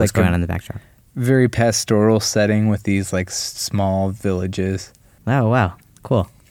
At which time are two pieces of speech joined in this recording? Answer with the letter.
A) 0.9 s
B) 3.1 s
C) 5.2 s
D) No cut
C